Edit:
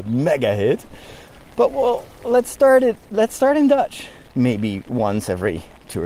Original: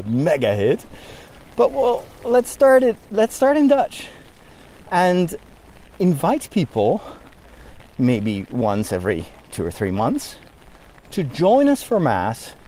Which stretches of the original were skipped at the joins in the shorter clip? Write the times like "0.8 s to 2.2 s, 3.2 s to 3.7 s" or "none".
4.3 s to 7.9 s